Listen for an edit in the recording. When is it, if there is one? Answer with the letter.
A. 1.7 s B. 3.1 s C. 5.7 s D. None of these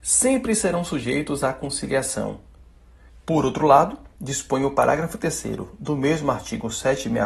B